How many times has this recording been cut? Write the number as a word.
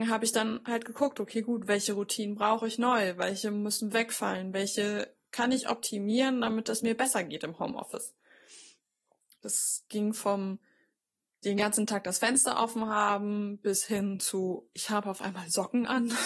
one